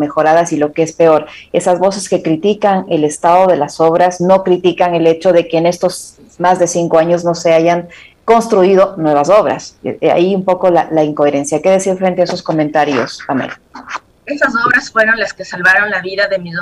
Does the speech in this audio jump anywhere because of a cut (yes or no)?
no